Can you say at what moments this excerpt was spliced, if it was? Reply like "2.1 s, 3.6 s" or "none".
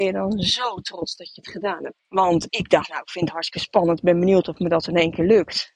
2.0 s